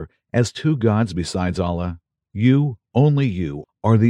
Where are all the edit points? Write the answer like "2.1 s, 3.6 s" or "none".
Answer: 2.2 s